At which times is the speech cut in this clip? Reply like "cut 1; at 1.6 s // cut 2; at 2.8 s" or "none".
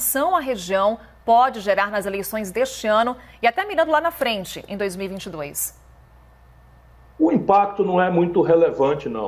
none